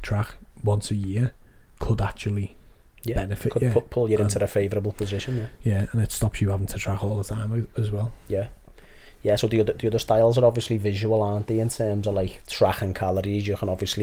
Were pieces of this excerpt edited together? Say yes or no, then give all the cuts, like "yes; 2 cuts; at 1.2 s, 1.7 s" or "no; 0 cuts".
no; 0 cuts